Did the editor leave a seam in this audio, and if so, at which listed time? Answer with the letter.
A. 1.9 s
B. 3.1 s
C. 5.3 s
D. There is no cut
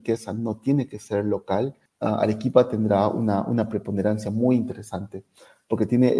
A